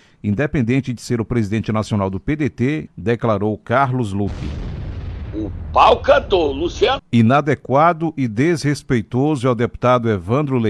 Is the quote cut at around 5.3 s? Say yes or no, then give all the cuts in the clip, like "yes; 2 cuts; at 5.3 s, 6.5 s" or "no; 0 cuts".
no; 2 cuts; at 2.9 s, 7.0 s